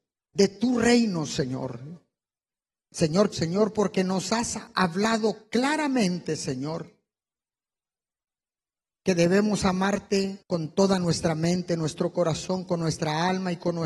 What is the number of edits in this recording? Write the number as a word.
two